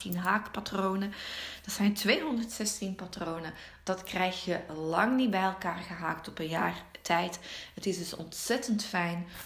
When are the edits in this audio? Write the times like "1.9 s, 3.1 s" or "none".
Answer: none